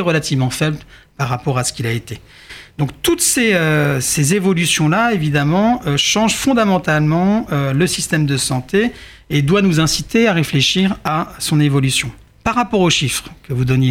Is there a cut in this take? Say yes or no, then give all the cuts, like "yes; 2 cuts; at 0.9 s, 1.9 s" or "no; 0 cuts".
no; 0 cuts